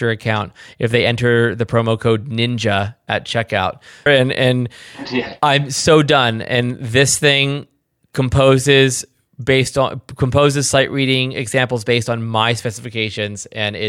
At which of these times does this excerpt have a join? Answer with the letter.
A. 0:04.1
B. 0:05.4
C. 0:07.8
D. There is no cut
A